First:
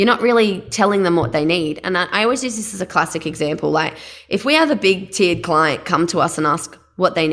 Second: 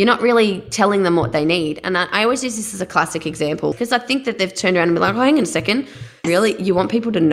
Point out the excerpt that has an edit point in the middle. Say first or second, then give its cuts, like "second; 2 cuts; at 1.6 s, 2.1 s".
second; 2 cuts; at 3.7 s, 6.2 s